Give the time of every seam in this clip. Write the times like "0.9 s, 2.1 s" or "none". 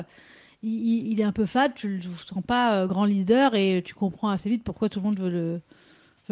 none